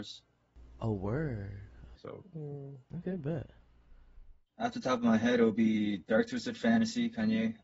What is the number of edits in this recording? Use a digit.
1